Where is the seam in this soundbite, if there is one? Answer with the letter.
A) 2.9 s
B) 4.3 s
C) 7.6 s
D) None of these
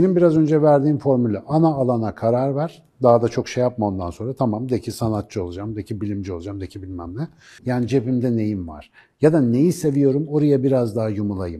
C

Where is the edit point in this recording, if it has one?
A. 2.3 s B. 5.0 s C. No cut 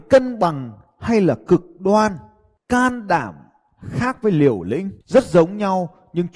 B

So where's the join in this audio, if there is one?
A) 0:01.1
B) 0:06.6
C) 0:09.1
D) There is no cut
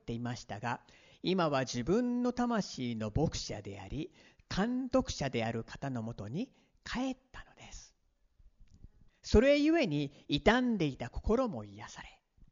C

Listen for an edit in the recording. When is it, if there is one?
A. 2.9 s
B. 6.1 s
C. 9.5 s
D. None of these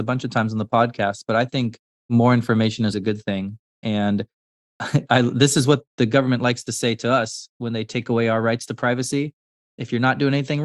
A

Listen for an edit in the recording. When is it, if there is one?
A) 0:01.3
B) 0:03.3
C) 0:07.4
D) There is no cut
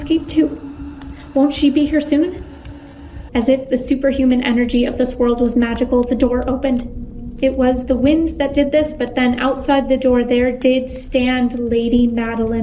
B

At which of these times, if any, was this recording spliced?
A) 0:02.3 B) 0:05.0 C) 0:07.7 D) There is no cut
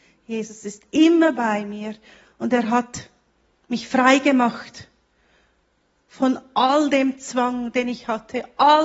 D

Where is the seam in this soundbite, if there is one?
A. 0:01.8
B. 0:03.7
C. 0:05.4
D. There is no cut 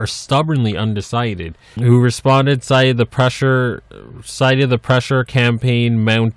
A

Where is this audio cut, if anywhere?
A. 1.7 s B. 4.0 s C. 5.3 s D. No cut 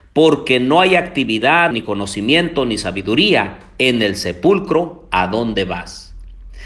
A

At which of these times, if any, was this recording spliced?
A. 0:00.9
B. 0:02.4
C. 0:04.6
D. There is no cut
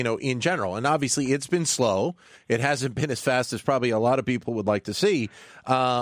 D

